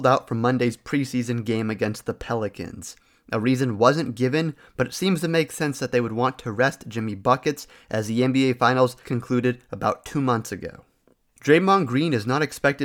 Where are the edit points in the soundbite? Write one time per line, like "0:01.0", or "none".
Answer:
0:09.0